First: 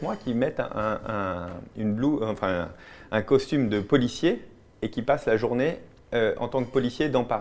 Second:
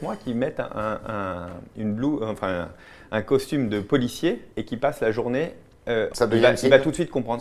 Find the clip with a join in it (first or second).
second